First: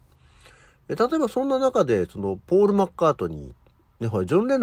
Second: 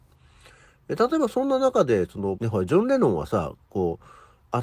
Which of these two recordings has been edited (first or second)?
second